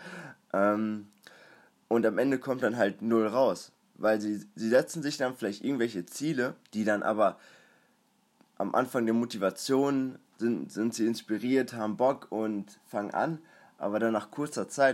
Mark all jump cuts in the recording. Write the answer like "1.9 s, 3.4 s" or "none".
6.6 s